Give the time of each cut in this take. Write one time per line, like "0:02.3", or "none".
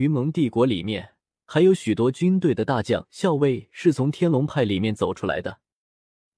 none